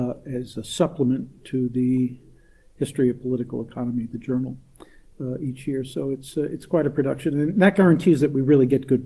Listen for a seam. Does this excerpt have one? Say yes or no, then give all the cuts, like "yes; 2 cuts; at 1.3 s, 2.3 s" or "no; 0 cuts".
yes; 1 cut; at 5.1 s